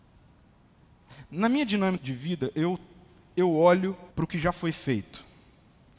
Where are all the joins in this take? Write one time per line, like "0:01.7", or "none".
0:02.0
0:04.1